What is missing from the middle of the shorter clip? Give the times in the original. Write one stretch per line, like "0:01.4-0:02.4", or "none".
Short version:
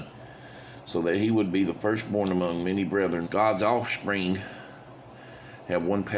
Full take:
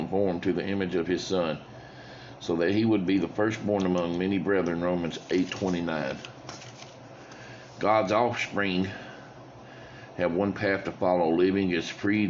0:04.8-0:07.7